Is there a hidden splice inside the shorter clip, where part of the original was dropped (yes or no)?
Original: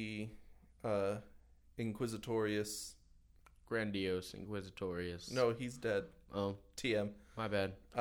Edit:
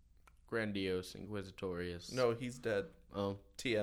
no